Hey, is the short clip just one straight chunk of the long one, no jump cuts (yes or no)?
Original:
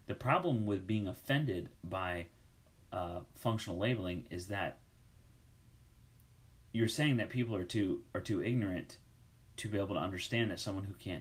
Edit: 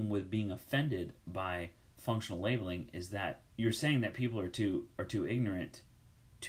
no